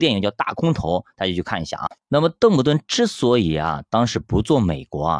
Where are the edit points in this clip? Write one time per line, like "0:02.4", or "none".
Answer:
0:02.0